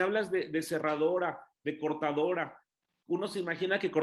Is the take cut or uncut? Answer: uncut